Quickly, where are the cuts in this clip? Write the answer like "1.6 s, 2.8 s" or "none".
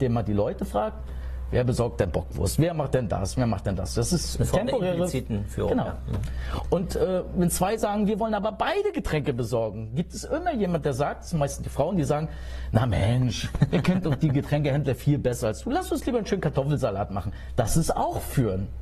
none